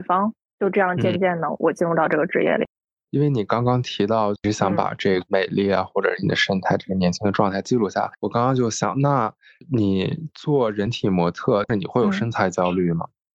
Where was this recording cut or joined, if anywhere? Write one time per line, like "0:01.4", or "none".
none